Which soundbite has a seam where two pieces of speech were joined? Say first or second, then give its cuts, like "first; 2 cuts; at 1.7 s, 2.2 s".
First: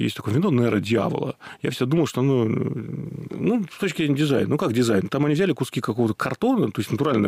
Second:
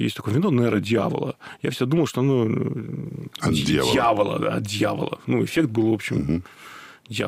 first; 1 cut; at 3.3 s